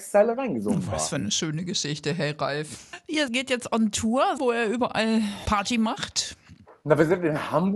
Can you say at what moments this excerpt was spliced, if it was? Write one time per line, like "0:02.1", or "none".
0:04.4

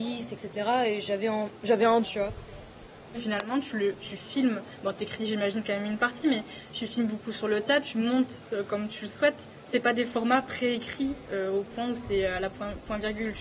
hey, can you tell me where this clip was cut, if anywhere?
0:02.0
0:03.1

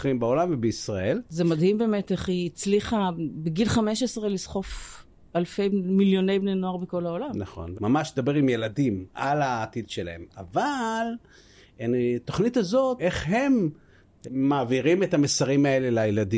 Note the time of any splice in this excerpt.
0:07.7
0:13.0
0:14.2

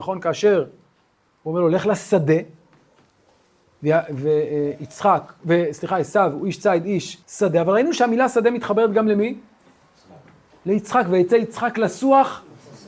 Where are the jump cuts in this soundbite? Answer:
0:07.2

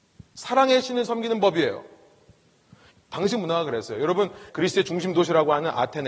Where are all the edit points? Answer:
0:02.9
0:04.5

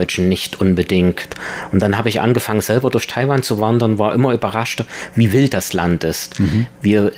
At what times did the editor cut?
none

